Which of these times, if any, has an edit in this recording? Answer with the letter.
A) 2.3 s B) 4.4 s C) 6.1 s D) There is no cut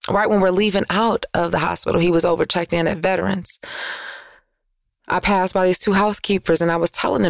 D